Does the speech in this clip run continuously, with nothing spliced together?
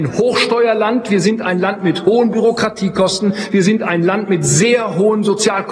yes; 0 cuts

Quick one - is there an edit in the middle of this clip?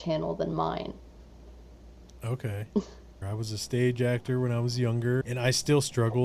yes; 2 cuts; at 3.2 s, 5.2 s

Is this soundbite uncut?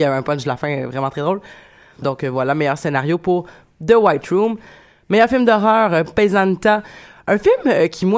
no; 1 cut; at 2.0 s

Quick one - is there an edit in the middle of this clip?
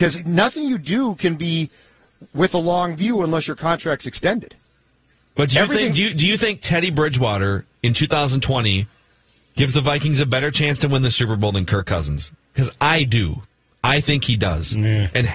no; 0 cuts

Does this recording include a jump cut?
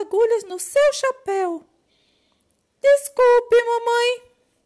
no; 0 cuts

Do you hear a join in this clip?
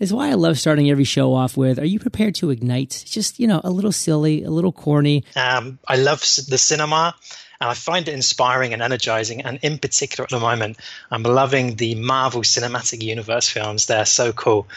yes; 1 cut; at 5.3 s

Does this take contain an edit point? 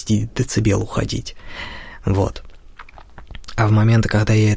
no; 0 cuts

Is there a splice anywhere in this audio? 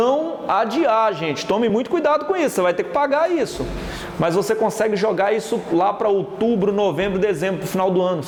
no; 0 cuts

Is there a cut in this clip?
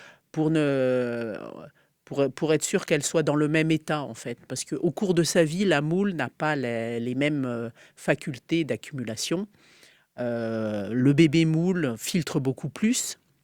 no; 0 cuts

